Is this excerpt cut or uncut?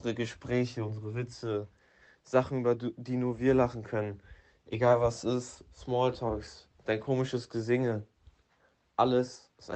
uncut